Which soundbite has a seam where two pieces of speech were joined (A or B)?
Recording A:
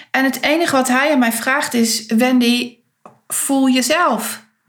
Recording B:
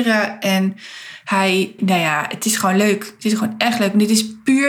B